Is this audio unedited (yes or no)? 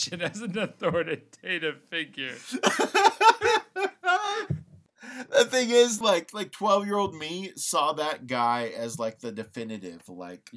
no